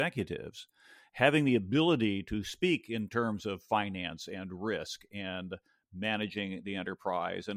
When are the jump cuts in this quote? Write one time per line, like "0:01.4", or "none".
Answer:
none

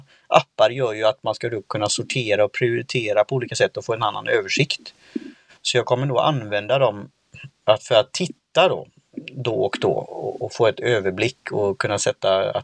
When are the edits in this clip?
none

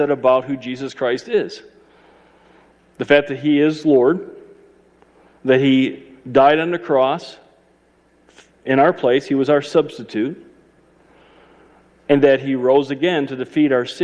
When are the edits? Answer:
none

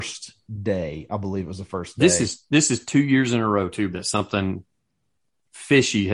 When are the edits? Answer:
0:03.9

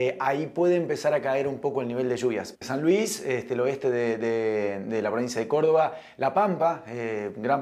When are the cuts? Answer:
0:02.5

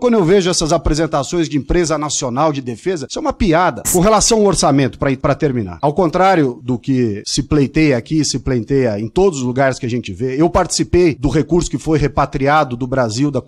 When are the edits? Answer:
0:03.8

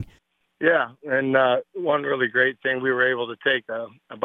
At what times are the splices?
none

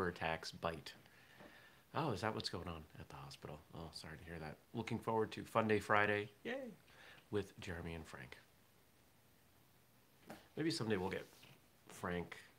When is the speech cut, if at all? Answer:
none

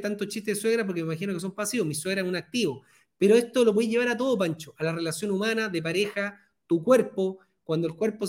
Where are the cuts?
none

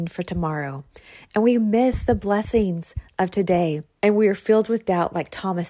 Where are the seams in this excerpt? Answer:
0:04.0

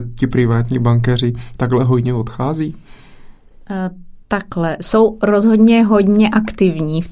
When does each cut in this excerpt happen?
none

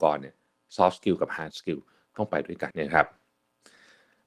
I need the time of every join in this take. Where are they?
0:02.7

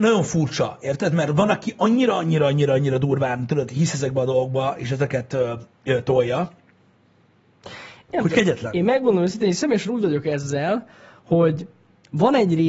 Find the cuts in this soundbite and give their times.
none

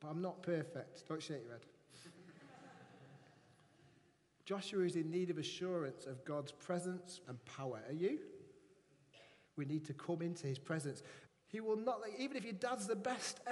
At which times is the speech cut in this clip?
0:07.2
0:09.5
0:11.3

